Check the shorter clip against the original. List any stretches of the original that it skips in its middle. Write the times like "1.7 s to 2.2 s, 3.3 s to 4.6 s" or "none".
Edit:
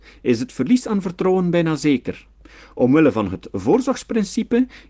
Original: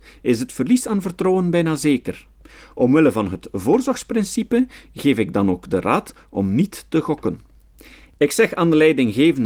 none